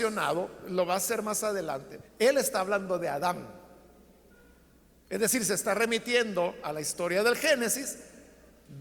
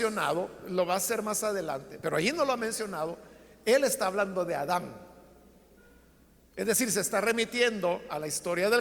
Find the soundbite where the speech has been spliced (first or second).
first